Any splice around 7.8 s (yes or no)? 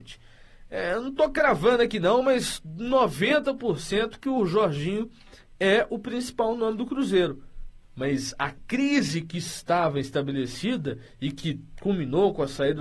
yes